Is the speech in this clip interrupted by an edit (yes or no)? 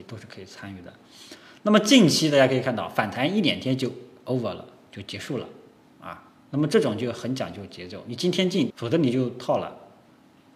yes